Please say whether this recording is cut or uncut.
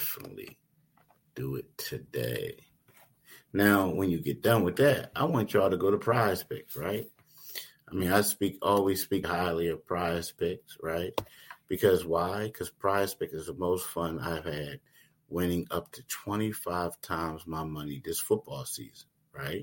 cut